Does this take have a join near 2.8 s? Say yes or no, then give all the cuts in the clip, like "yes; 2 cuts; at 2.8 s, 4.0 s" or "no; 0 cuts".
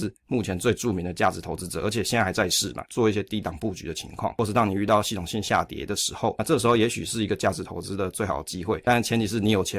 yes; 1 cut; at 2.8 s